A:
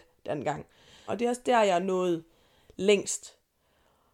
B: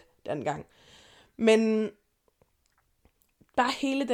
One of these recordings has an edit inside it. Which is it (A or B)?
A